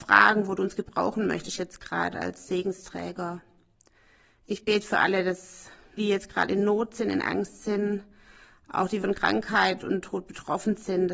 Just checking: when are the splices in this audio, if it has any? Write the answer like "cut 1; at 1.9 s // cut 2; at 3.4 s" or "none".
cut 1; at 6.0 s // cut 2; at 9.0 s

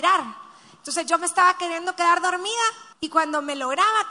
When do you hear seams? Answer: cut 1; at 2.9 s

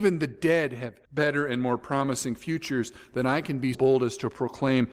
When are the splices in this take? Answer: cut 1; at 1.0 s // cut 2; at 3.7 s

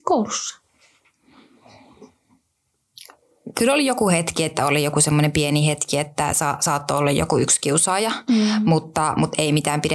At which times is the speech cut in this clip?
none

